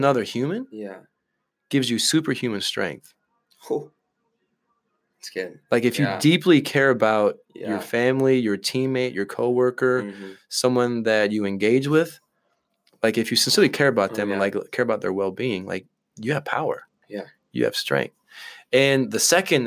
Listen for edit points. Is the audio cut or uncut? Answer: uncut